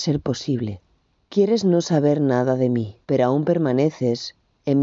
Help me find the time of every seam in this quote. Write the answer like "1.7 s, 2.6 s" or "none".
1.3 s, 3.0 s